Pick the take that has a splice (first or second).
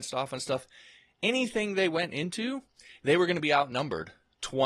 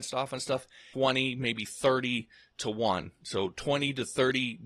second